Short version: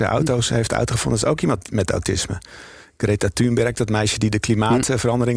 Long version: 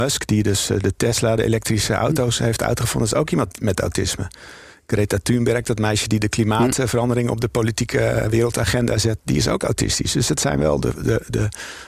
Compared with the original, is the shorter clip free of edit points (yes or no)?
yes